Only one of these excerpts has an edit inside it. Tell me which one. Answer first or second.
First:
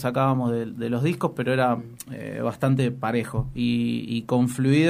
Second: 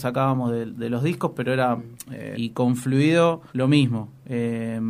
second